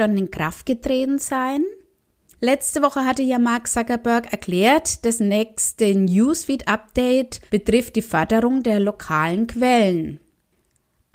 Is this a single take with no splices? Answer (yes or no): no